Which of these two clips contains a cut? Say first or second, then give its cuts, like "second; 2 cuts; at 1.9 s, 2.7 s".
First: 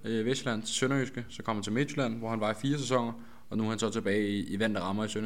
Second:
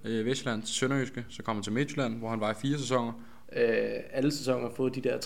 second; 1 cut; at 3.5 s